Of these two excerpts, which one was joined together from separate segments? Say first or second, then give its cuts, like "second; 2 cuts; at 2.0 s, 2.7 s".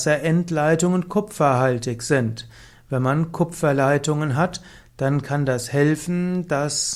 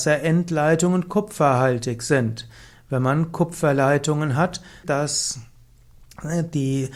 second; 1 cut; at 4.8 s